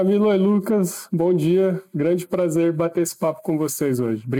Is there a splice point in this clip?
no; 0 cuts

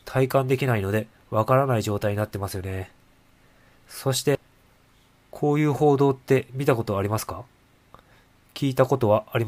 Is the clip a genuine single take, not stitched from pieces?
yes; 0 cuts

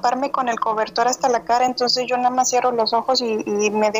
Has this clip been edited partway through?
no; 0 cuts

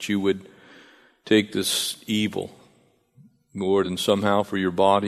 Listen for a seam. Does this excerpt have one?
no; 0 cuts

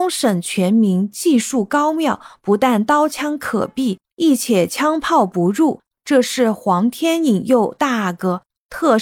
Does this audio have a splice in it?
no; 0 cuts

